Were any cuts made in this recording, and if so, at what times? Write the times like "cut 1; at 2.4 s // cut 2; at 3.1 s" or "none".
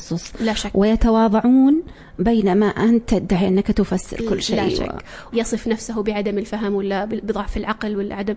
cut 1; at 5.3 s

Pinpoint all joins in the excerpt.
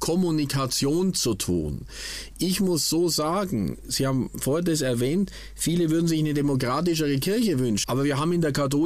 cut 1; at 7.8 s

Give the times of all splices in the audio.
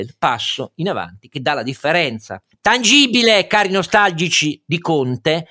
none

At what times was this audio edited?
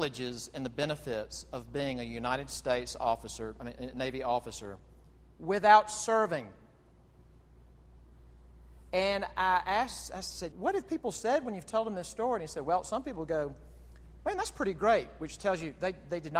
cut 1; at 10.5 s

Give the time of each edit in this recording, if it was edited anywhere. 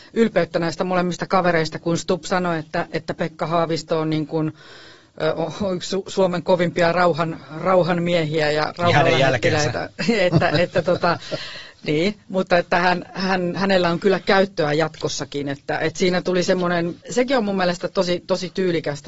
cut 1; at 17.0 s

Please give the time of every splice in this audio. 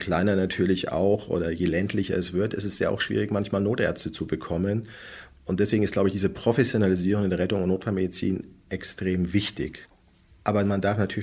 none

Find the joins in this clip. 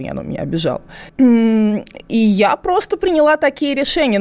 cut 1; at 1.1 s

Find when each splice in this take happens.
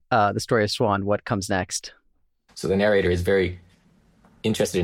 cut 1; at 2.5 s

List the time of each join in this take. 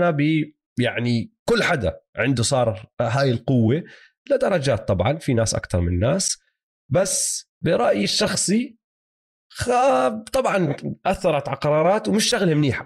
cut 1; at 7.5 s

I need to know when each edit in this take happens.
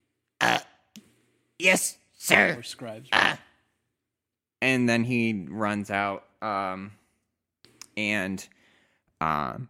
none

